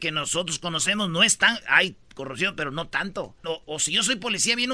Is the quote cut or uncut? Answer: cut